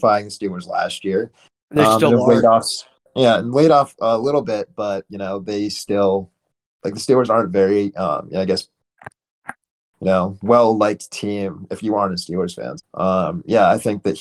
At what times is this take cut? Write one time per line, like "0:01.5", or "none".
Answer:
0:12.8